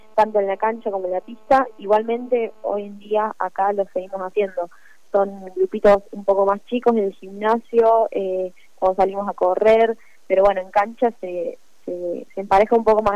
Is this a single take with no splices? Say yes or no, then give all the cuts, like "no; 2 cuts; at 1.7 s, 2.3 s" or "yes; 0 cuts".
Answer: yes; 0 cuts